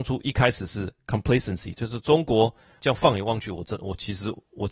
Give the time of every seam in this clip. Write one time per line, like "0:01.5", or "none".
0:02.8